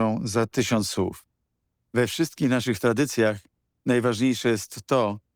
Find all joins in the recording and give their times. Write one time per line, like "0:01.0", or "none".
none